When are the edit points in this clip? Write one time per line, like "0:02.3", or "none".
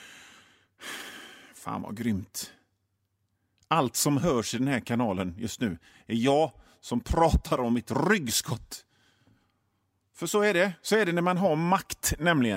none

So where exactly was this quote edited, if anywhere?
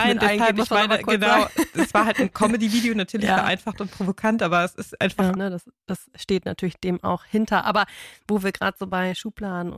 0:05.4

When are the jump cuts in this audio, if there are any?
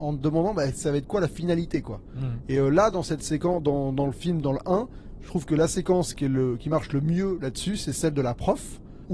none

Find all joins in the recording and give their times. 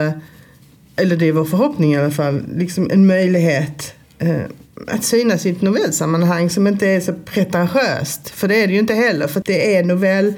0:09.4

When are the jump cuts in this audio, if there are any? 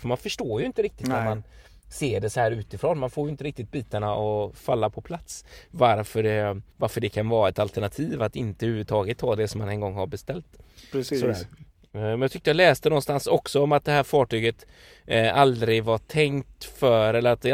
0:06.7

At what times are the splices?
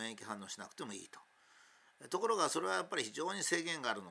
none

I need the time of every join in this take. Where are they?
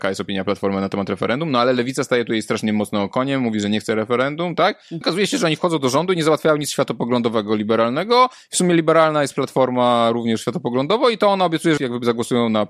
0:05.0
0:11.8

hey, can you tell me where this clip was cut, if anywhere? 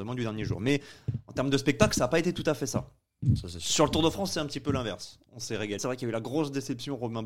0:05.8

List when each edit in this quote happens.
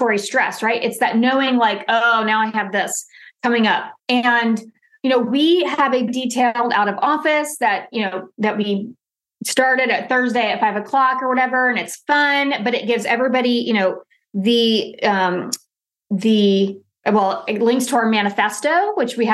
0:04.0
0:06.1

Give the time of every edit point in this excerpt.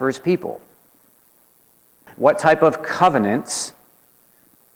0:02.1

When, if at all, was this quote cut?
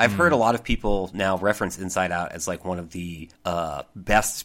0:03.3

